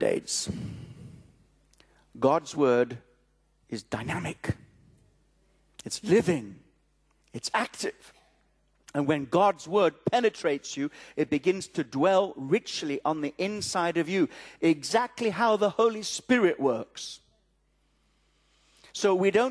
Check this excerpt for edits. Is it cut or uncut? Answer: uncut